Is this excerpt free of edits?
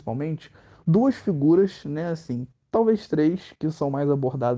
yes; 0 cuts

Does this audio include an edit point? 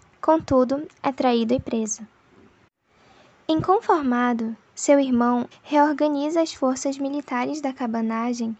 yes; 1 cut; at 5.5 s

